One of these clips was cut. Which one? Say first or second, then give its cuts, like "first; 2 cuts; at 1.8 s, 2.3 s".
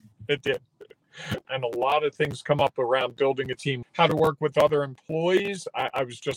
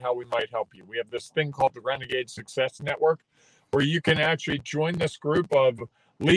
first; 2 cuts; at 1.4 s, 3.8 s